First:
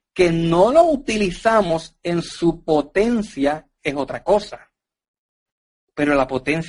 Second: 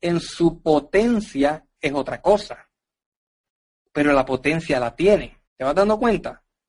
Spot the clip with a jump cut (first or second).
second